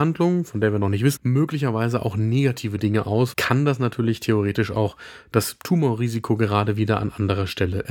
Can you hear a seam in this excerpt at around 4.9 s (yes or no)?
no